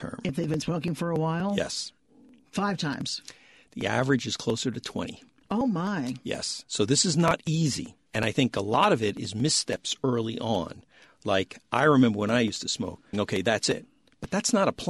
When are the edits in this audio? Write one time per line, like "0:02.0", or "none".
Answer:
0:13.1

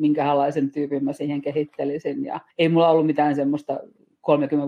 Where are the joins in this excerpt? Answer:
0:02.5

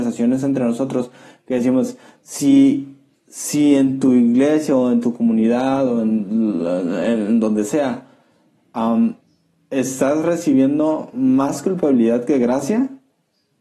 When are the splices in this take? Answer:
none

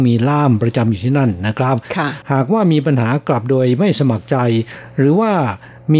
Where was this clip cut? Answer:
none

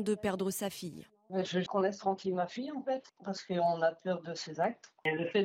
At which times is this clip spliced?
0:01.7

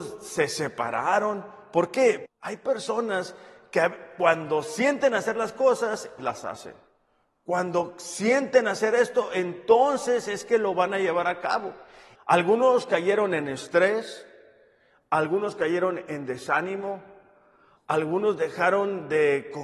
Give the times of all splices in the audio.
0:02.3
0:06.2
0:12.1

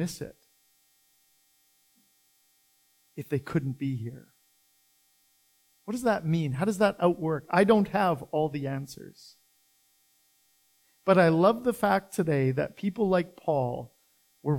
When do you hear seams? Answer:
none

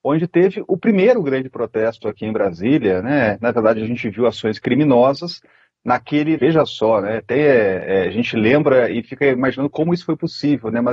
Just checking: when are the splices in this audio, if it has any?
0:06.4

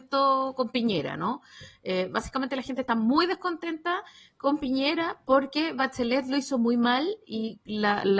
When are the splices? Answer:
none

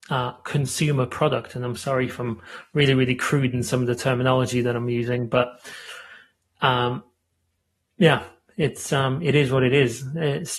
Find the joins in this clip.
none

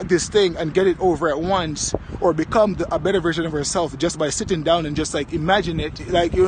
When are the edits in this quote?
none

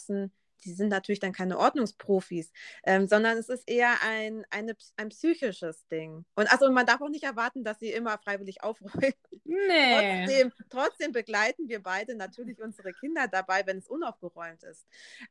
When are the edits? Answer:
none

